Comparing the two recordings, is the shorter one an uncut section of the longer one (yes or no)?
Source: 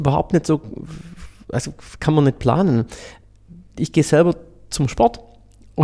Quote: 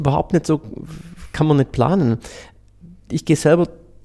no